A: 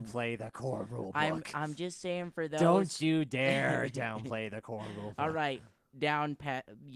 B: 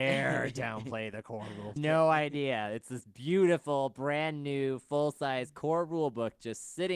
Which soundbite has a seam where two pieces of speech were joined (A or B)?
B